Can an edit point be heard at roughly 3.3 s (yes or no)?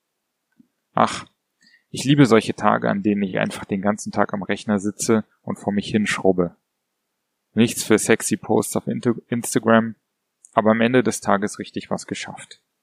no